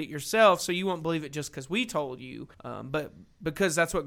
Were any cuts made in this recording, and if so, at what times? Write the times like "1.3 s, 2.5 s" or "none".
2.5 s